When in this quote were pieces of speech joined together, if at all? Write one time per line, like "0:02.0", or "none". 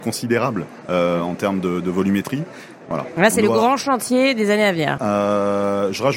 0:02.9
0:05.0